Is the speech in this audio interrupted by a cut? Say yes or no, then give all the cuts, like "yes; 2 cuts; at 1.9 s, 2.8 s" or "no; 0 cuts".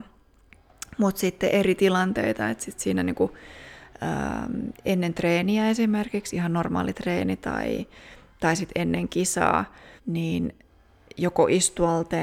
yes; 1 cut; at 10.0 s